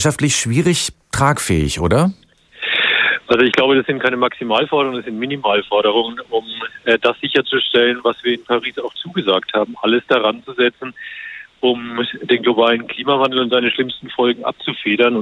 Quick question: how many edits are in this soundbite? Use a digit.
0